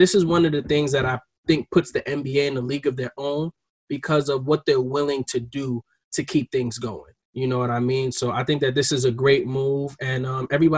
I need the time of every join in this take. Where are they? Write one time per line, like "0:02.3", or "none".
0:07.2